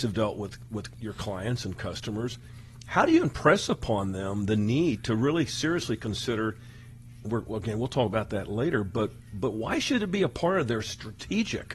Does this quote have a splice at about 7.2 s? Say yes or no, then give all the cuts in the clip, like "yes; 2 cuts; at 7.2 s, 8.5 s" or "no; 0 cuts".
yes; 1 cut; at 7.2 s